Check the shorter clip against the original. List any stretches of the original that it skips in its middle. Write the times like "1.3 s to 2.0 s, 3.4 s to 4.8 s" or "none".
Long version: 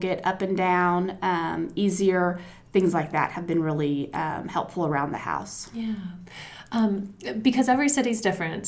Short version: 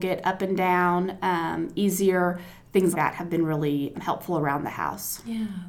2.9 s to 3.1 s, 4.1 s to 4.4 s